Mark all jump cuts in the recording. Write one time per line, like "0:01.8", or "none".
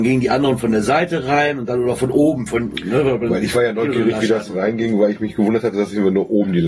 none